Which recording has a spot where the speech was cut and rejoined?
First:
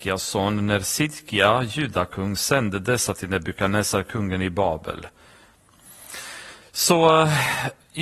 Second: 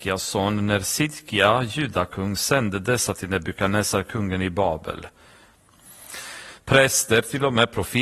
second; 1 cut; at 6.6 s

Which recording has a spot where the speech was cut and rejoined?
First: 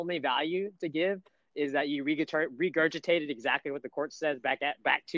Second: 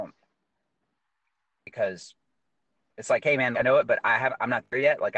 second; 1 cut; at 3.5 s

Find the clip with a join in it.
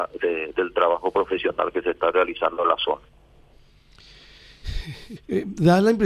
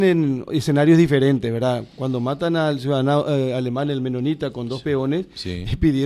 first; 1 cut; at 5.2 s

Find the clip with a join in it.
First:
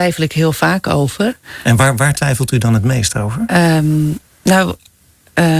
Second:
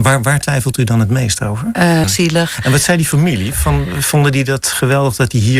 second; 1 cut; at 2.0 s

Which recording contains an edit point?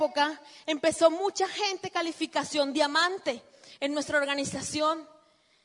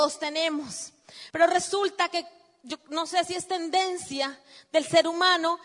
second; 1 cut; at 1.3 s

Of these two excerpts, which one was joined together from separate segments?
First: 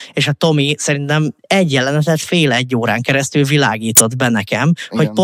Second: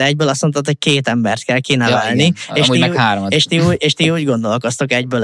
first; 1 cut; at 1.4 s

